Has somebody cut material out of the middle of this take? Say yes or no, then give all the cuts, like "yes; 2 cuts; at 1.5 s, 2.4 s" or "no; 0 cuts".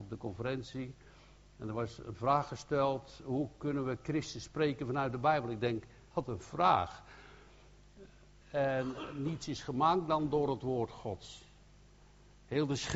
yes; 2 cuts; at 6.1 s, 8.4 s